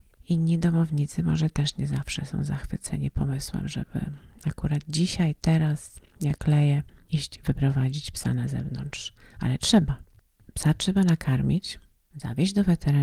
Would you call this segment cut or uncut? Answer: uncut